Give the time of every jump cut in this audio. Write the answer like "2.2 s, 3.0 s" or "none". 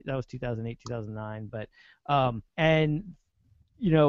2.5 s